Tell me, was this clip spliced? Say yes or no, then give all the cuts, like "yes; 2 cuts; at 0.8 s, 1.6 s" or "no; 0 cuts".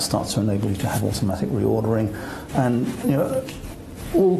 yes; 1 cut; at 2.5 s